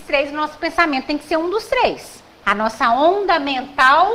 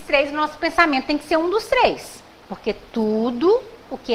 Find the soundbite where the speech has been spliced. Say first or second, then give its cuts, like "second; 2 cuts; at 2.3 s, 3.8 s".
first; 1 cut; at 2.4 s